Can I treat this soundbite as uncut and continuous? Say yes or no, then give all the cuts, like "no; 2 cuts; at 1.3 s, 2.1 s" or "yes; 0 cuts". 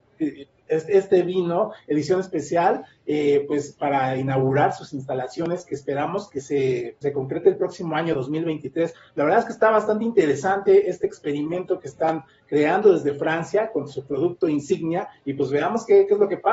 no; 1 cut; at 7.0 s